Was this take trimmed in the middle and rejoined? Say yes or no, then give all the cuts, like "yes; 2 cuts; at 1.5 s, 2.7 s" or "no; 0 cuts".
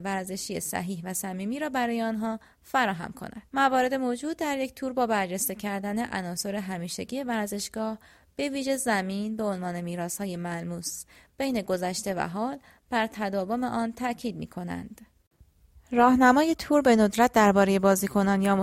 yes; 1 cut; at 3.5 s